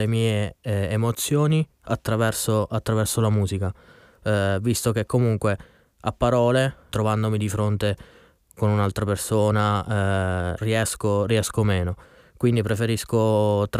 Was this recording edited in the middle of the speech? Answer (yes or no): yes